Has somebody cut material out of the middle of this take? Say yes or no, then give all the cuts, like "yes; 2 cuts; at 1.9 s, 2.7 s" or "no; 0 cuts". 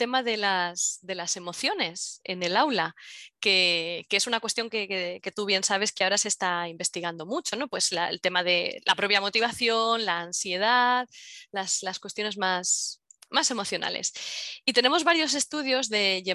no; 0 cuts